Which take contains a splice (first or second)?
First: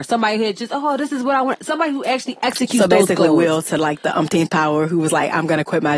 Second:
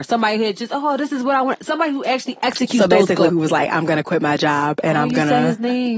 second